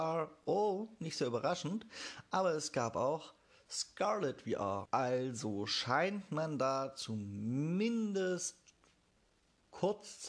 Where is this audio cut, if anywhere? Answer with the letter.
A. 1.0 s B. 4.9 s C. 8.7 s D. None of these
B